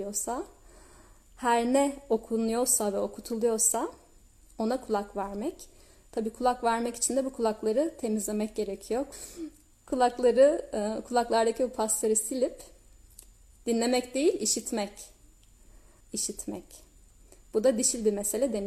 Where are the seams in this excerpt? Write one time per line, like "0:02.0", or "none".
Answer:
0:09.1
0:16.0